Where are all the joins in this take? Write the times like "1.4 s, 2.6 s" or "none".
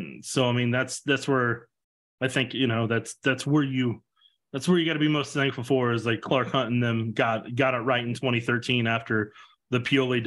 none

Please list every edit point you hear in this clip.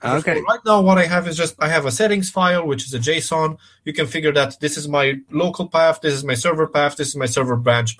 1.6 s

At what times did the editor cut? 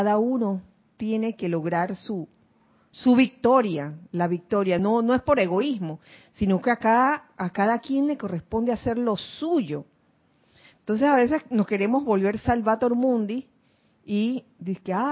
none

